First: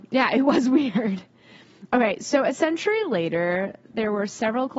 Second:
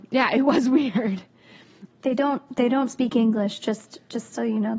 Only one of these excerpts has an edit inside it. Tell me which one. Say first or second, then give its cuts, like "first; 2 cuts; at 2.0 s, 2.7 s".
second; 1 cut; at 1.9 s